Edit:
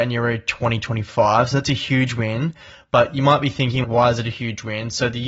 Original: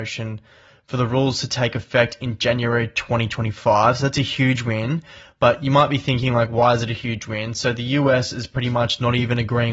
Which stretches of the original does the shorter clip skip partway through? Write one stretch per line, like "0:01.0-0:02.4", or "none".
0:06.3-0:06.5